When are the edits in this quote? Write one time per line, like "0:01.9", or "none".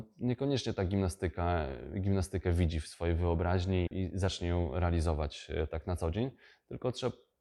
0:03.9